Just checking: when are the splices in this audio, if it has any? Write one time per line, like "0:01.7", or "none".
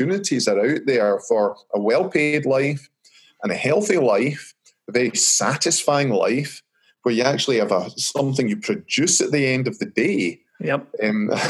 none